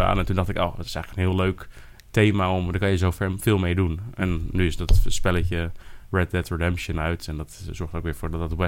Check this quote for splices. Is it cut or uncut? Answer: uncut